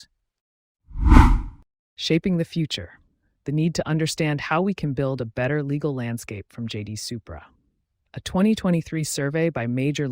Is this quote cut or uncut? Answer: uncut